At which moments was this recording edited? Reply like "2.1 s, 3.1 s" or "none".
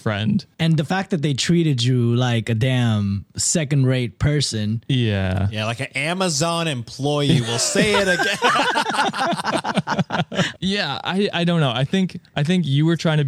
none